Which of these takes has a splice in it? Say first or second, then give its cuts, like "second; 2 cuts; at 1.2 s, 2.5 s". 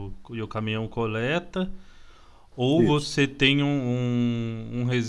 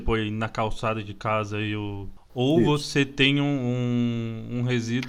second; 1 cut; at 2.2 s